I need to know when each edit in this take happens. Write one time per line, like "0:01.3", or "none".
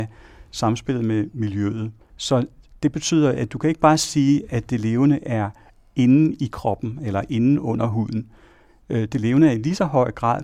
0:02.1